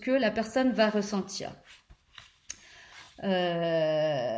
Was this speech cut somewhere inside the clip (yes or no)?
no